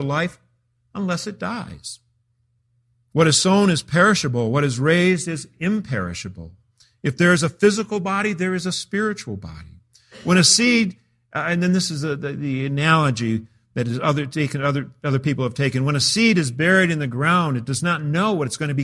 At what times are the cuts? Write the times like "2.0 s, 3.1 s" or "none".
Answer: none